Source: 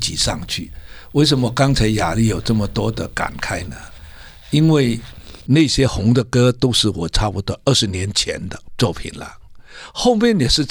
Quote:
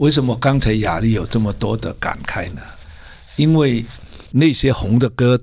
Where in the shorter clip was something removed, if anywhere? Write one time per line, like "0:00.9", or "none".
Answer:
none